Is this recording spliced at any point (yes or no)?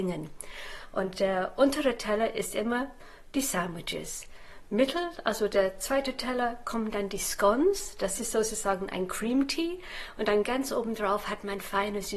no